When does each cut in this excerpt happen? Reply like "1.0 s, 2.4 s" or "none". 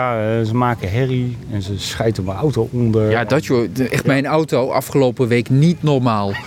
none